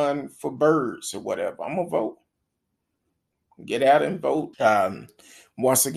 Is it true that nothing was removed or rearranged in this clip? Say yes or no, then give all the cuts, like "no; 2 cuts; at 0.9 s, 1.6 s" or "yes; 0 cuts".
no; 1 cut; at 4.5 s